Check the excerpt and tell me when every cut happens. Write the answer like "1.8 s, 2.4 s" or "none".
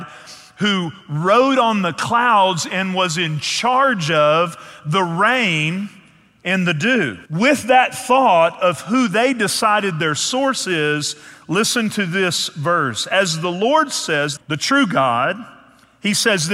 7.3 s, 14.4 s